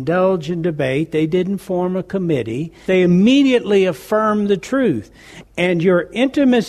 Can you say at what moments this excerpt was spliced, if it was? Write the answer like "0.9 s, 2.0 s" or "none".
2.9 s, 5.4 s